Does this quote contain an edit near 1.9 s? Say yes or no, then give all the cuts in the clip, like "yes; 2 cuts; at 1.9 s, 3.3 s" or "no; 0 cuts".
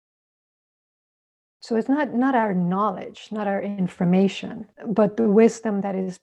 no; 1 cut; at 4.7 s